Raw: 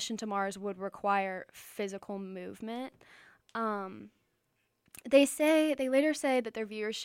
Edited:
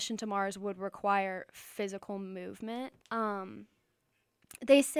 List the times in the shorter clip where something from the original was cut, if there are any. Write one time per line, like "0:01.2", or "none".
0:03.0